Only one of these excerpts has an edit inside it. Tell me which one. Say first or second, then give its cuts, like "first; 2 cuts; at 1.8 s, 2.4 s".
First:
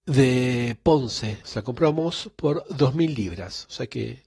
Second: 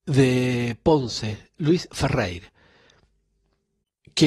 first; 1 cut; at 1.4 s